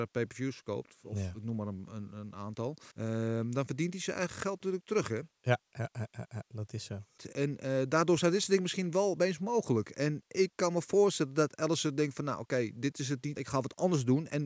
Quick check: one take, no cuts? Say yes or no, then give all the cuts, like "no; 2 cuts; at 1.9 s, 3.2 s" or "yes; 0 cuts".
no; 3 cuts; at 2.9 s, 7.2 s, 13.4 s